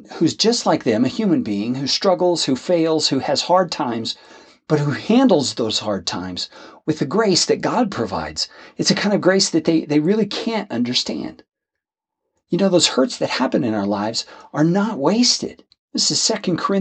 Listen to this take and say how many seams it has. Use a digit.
1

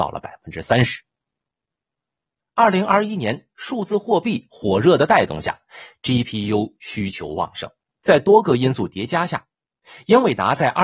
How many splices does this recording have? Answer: 2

